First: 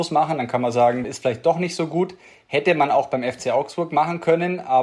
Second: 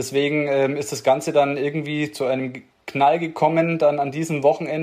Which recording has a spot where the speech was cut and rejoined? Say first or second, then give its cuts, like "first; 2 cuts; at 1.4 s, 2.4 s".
first; 1 cut; at 1.0 s